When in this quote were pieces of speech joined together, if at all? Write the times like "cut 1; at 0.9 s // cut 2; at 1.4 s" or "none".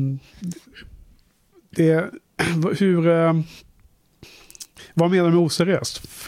none